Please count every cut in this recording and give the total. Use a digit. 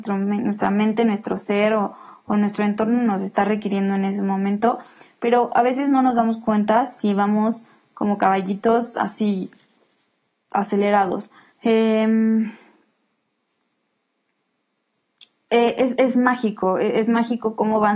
1